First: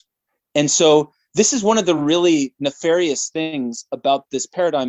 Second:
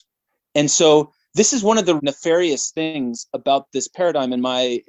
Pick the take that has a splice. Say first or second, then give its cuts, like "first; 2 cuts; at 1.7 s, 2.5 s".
second; 1 cut; at 2.0 s